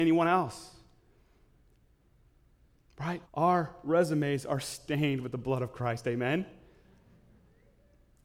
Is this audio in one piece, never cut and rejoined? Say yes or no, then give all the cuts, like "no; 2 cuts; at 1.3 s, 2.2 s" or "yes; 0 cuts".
no; 1 cut; at 3.3 s